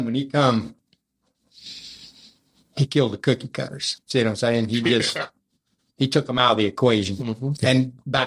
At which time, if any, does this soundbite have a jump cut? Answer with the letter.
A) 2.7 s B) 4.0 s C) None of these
B